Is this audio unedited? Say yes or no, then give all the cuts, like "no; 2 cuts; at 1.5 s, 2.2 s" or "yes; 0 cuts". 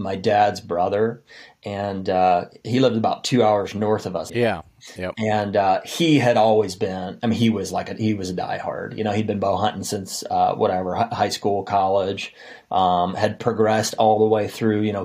no; 1 cut; at 4.3 s